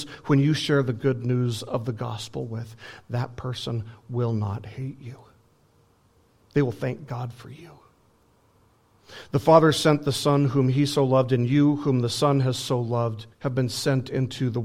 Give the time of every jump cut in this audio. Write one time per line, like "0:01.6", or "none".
0:13.3